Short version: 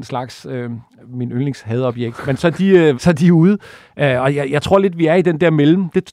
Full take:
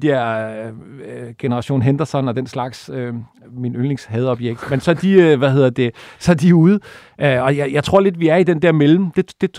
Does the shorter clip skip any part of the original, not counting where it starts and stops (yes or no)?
yes